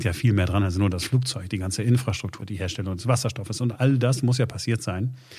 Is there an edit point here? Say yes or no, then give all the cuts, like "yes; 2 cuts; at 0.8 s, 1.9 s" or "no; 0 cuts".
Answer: yes; 2 cuts; at 2.4 s, 3.7 s